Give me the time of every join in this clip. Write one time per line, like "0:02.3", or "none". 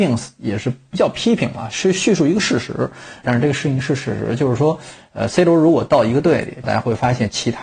0:03.2
0:06.6